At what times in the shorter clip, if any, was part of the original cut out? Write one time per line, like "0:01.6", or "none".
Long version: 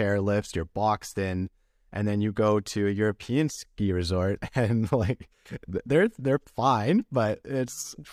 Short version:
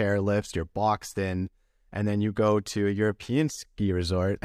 none